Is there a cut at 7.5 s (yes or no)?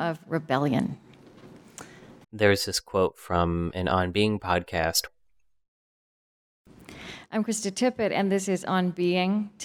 no